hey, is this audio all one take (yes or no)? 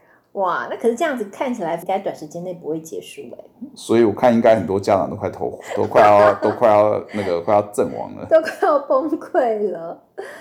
yes